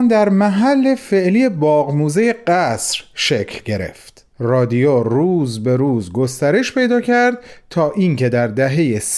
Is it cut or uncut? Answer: cut